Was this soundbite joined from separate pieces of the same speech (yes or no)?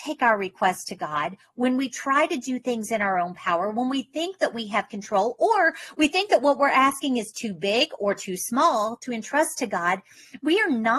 no